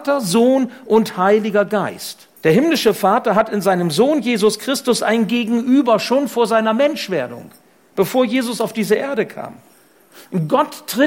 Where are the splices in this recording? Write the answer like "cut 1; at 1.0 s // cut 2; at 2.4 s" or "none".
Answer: cut 1; at 2.4 s